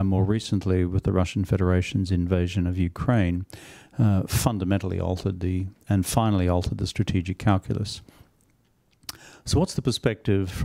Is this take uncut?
yes; 0 cuts

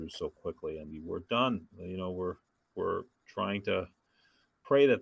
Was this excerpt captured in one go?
no; 1 cut; at 0.9 s

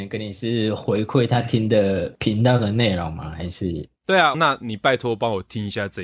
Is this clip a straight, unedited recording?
no; 1 cut; at 4.3 s

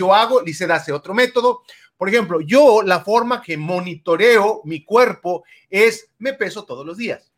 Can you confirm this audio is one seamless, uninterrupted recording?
no; 1 cut; at 3.4 s

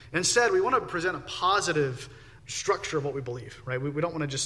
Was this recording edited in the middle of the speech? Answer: yes; 1 cut; at 2.4 s

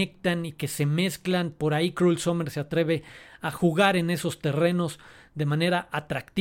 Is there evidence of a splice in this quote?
no; 0 cuts

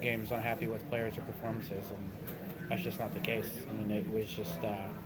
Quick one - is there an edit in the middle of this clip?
no; 0 cuts

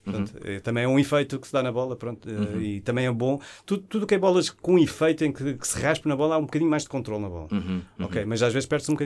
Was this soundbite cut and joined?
no; 0 cuts

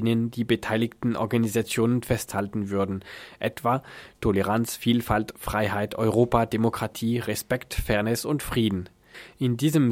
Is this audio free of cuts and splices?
yes; 0 cuts

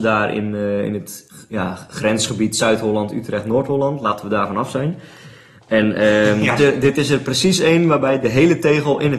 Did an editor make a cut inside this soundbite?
yes; 1 cut; at 6.6 s

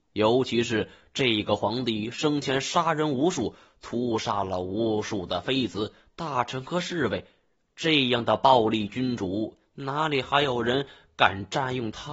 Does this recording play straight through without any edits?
yes; 0 cuts

